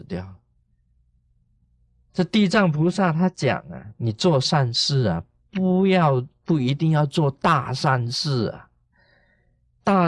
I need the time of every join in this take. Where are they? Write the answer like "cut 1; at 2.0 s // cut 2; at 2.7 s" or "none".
none